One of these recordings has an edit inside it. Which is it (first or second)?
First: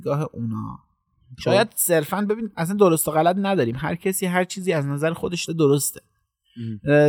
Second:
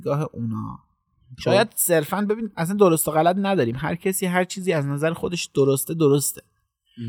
first